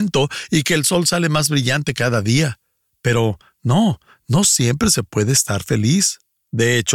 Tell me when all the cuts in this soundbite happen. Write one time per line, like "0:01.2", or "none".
none